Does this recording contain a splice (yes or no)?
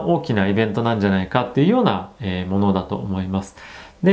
no